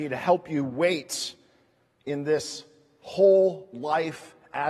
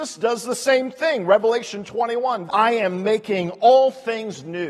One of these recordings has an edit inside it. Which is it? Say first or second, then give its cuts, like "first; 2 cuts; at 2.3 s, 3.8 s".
second; 1 cut; at 2.5 s